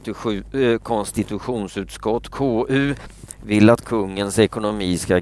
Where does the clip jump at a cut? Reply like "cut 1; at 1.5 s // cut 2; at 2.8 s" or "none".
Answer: none